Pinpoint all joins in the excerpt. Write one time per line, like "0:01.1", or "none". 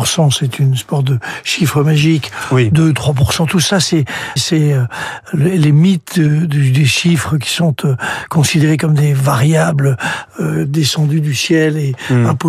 0:04.4